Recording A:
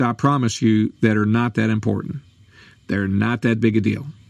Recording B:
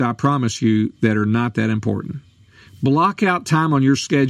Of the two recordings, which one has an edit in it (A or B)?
B